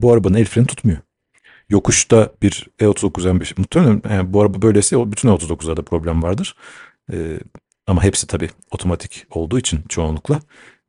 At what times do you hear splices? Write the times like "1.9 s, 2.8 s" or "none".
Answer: none